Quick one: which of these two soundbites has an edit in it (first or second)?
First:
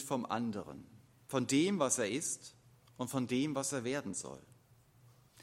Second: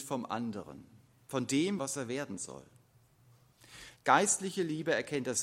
second